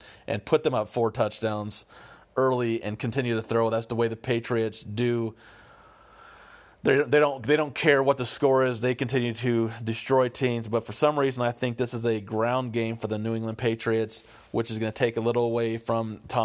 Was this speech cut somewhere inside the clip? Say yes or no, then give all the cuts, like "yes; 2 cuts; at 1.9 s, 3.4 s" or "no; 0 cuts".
no; 0 cuts